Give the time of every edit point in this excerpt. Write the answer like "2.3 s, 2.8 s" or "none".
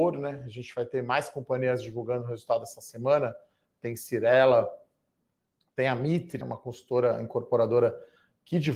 6.4 s